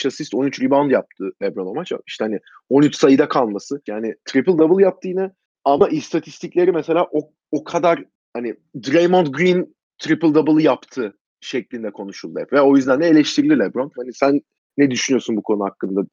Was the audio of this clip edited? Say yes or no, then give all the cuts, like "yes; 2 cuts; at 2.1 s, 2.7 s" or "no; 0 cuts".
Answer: yes; 2 cuts; at 3.9 s, 14.0 s